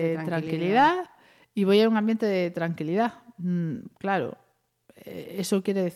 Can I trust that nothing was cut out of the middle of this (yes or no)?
yes